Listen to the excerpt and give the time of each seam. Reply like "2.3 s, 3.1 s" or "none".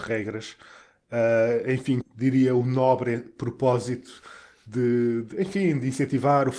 2.0 s